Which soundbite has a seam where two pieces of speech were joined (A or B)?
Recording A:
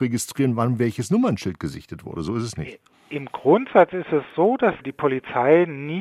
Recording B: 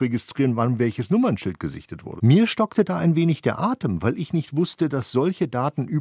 B